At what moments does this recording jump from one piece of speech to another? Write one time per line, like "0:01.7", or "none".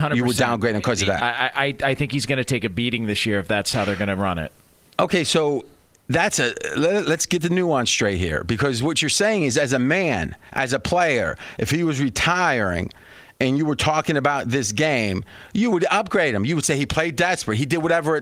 0:01.2